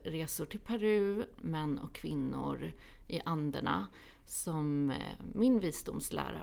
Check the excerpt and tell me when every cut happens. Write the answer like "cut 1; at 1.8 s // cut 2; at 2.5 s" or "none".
cut 1; at 1.4 s